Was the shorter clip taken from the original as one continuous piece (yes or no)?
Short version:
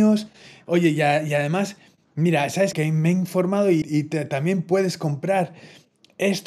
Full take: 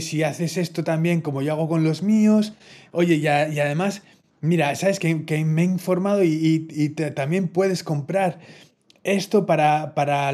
no